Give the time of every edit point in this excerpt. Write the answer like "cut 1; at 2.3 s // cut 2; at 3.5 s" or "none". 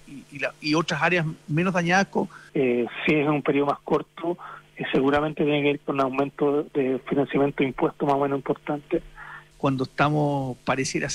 cut 1; at 2.5 s // cut 2; at 9.5 s